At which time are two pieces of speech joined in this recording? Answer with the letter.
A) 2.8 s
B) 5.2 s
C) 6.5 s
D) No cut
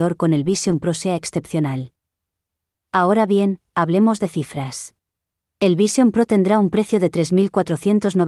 D